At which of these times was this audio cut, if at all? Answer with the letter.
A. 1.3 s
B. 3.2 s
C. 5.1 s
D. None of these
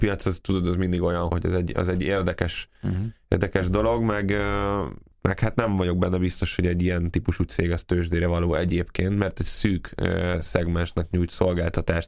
A